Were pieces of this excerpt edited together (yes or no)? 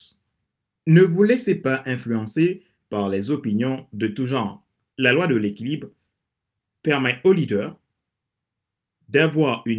yes